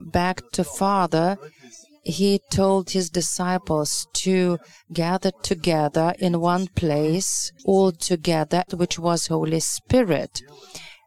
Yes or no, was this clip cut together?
yes